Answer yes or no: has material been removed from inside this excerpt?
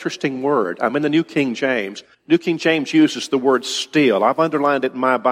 yes